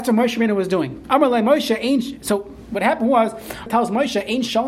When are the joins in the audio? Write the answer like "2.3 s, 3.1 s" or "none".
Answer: 3.7 s